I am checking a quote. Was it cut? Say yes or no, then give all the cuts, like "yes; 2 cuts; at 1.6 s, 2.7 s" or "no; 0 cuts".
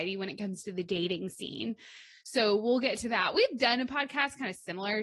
no; 0 cuts